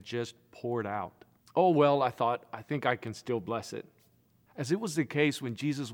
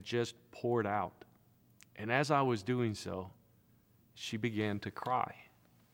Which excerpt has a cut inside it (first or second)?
first